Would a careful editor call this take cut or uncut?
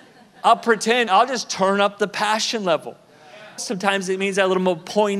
cut